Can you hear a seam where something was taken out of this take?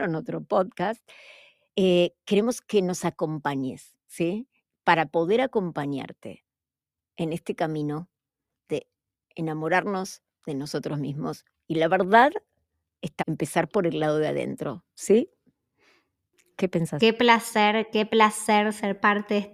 yes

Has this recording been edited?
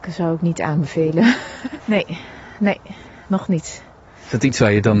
yes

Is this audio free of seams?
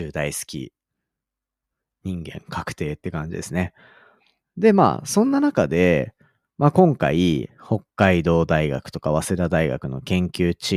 no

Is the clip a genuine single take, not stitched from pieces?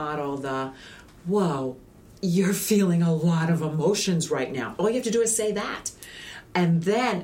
yes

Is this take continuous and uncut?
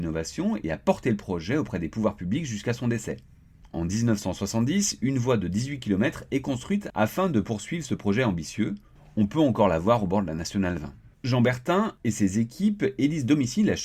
yes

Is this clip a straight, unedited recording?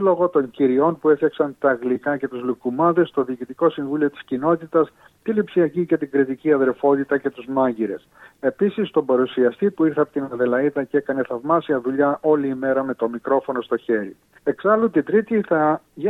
no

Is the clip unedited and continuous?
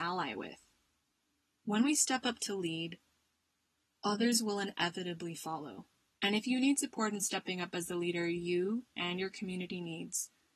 no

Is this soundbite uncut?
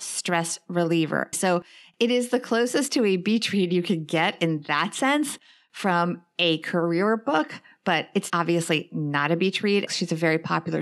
no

